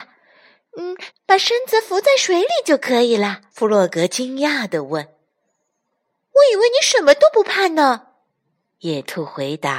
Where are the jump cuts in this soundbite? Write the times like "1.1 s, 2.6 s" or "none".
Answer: 1.1 s, 3.5 s, 8.3 s